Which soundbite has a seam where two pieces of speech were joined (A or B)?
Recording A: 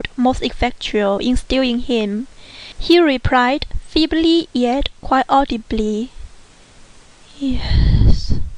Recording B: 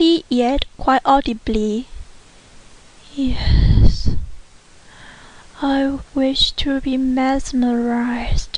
A